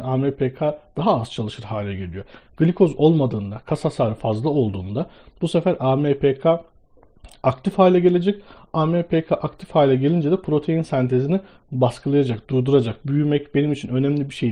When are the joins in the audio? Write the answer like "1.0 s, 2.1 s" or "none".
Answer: 13.0 s